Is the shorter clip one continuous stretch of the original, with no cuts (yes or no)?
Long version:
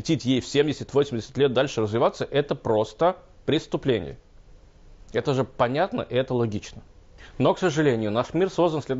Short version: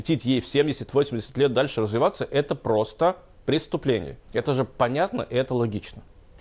no